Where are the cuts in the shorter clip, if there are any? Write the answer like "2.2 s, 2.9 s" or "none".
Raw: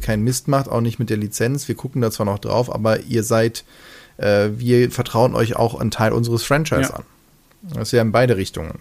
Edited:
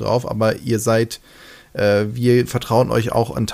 none